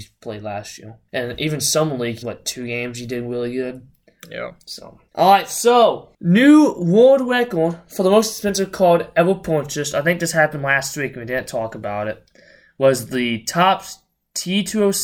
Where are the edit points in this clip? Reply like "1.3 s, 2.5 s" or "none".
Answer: 2.2 s